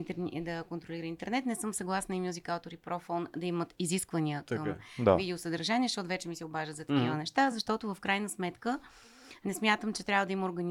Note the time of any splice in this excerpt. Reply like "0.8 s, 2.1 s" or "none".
none

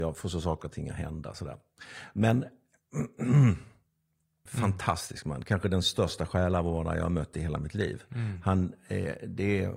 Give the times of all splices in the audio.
4.5 s

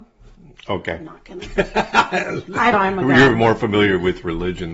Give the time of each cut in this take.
2.7 s

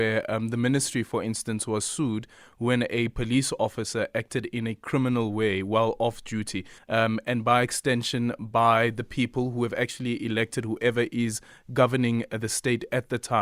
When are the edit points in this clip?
6.8 s

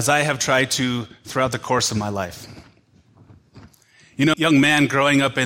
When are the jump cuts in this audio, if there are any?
4.3 s

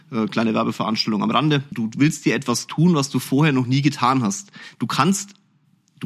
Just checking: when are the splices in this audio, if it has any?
1.7 s

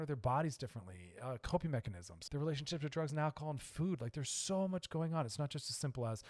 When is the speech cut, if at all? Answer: 2.3 s

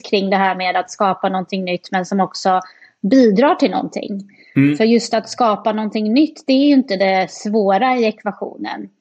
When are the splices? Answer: none

